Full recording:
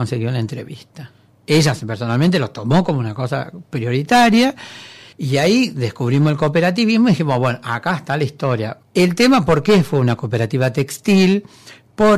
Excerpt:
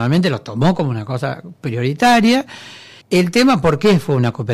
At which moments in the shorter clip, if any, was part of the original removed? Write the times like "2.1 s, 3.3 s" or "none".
3.0 s